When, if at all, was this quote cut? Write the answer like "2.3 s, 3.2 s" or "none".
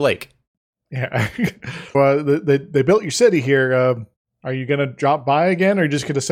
1.9 s